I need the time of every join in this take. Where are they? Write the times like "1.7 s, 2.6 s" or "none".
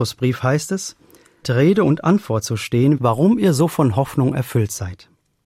1.4 s, 3.0 s